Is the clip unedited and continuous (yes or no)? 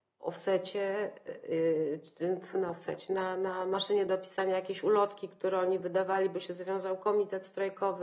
yes